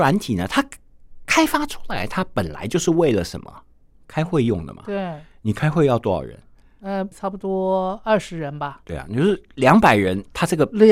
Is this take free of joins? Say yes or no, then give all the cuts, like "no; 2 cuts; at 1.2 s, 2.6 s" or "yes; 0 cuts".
no; 1 cut; at 7.1 s